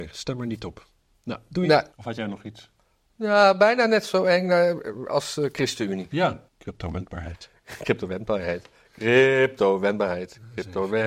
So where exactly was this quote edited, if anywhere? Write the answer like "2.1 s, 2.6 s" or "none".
1.9 s, 6.5 s